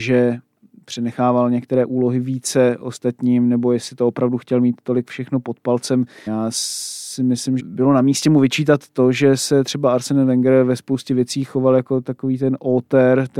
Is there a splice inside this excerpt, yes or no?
yes